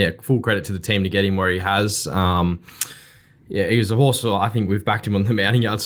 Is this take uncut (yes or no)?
yes